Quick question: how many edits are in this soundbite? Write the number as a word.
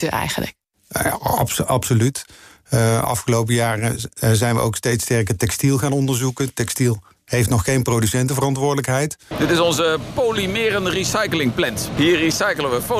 two